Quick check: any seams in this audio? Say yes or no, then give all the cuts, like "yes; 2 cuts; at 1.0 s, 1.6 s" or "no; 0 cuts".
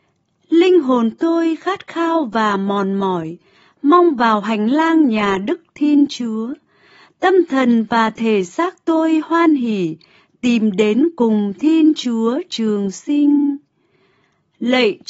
no; 0 cuts